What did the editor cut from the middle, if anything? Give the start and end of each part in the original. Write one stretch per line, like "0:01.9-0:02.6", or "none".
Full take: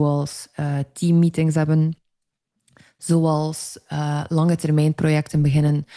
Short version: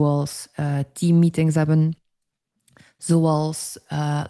none